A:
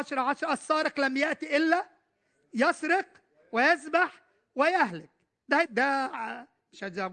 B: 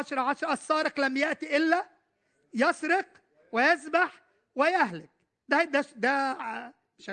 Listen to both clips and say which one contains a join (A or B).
A